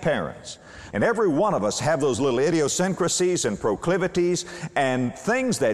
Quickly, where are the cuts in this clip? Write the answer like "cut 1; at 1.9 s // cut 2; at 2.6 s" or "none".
cut 1; at 0.9 s